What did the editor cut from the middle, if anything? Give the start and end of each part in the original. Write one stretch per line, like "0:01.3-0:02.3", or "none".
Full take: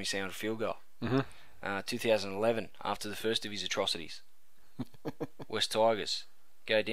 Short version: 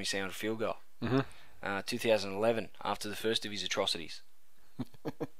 none